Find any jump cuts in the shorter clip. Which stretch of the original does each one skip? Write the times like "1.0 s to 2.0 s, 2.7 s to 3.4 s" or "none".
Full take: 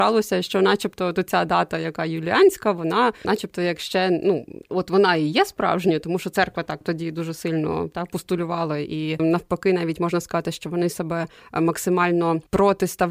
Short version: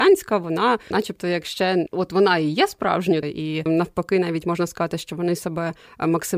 4.2 s to 4.6 s, 6.0 s to 8.8 s